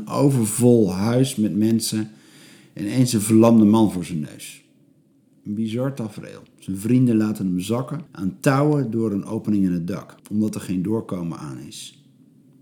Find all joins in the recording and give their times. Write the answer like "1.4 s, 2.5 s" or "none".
8.1 s, 10.2 s